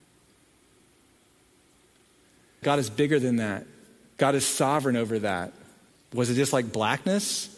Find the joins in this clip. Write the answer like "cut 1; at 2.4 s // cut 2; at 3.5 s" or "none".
cut 1; at 2.6 s // cut 2; at 5.9 s